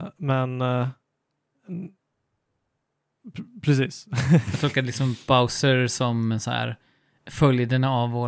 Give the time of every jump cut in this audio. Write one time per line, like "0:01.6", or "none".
none